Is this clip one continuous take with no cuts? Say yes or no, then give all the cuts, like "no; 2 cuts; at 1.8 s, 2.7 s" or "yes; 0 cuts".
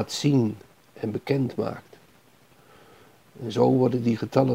yes; 0 cuts